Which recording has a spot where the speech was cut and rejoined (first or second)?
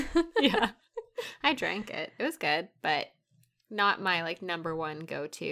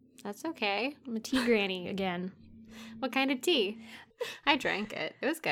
second